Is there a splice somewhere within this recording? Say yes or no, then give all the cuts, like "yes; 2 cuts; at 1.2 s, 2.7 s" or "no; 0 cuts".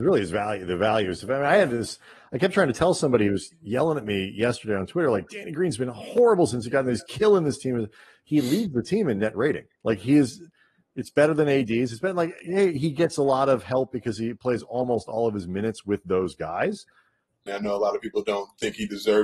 yes; 1 cut; at 17.5 s